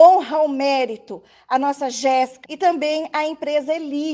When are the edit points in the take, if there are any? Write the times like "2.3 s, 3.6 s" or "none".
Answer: 2.4 s